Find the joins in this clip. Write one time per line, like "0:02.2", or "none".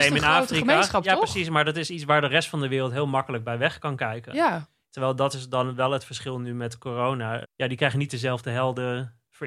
0:07.4